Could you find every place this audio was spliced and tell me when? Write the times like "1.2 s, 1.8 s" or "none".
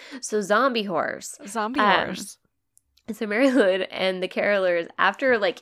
none